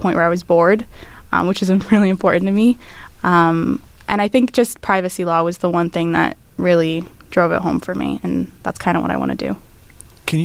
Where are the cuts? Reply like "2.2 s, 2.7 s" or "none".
6.5 s